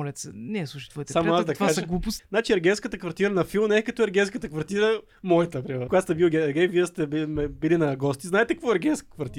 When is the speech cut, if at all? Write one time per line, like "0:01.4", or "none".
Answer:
0:02.2
0:05.9